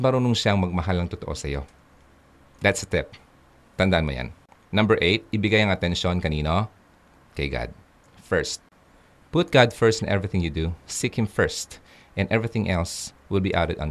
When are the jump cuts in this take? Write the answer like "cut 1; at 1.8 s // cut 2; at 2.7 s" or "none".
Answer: none